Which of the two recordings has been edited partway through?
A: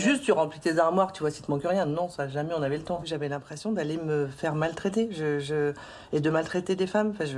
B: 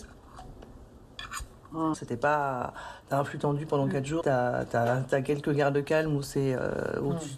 B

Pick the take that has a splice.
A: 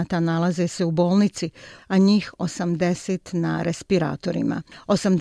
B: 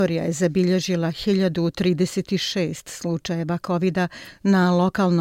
A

